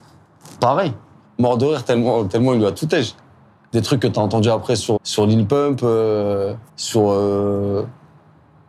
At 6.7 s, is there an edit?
yes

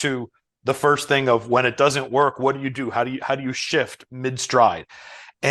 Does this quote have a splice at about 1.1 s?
no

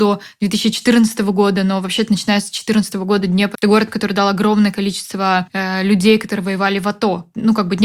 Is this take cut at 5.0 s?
no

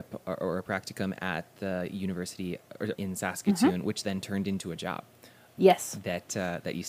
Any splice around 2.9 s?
yes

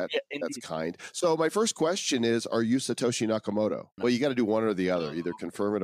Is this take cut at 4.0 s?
yes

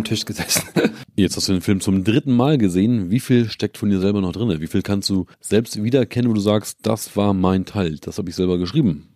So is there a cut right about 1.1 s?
no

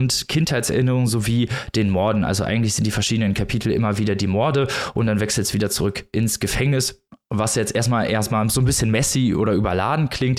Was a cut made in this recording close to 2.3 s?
no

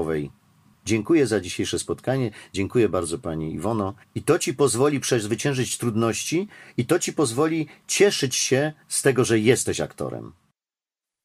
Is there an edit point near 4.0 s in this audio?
yes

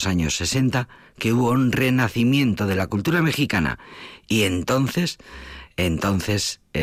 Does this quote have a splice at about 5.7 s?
no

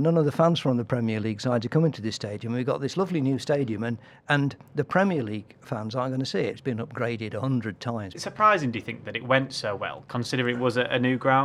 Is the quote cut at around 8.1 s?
yes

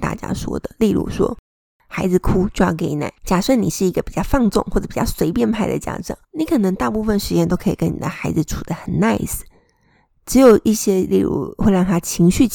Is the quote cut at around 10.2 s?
no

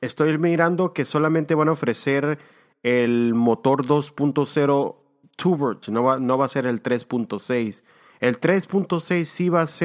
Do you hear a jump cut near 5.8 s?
yes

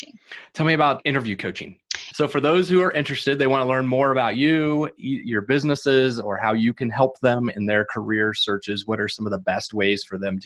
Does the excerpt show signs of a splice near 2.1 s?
yes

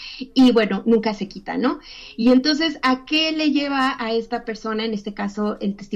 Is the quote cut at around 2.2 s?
no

